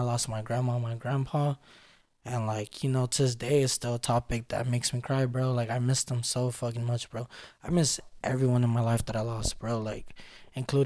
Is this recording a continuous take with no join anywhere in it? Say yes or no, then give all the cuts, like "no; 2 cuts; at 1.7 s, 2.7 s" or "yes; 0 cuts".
yes; 0 cuts